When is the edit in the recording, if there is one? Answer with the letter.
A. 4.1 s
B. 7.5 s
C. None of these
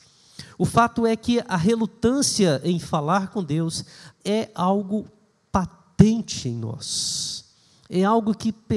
A